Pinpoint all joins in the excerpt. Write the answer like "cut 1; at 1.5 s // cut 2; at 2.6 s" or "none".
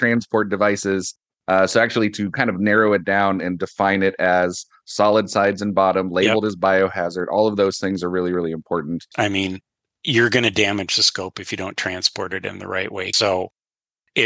cut 1; at 9.1 s // cut 2; at 13.1 s